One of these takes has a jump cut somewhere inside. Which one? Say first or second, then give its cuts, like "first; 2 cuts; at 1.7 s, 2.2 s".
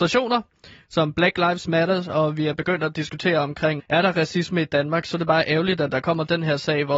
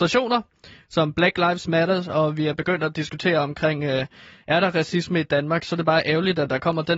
first; 1 cut; at 3.8 s